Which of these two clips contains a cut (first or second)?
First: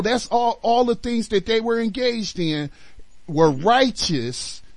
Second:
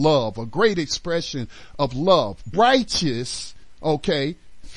second